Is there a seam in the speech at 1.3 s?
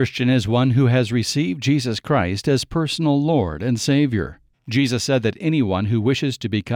no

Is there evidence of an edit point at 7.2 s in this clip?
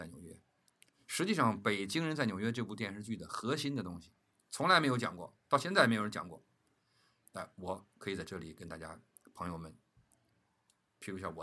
yes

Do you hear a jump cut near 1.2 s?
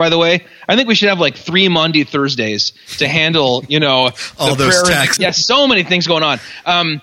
no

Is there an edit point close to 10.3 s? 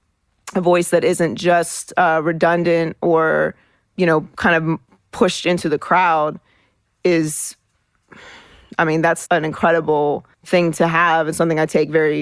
yes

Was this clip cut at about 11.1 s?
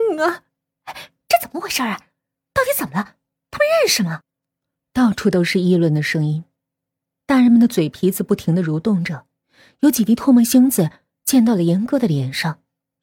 no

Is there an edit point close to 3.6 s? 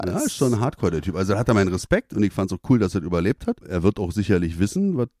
yes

